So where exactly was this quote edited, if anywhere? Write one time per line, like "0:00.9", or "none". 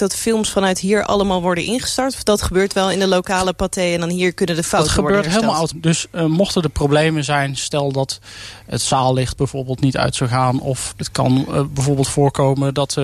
0:05.7
0:10.9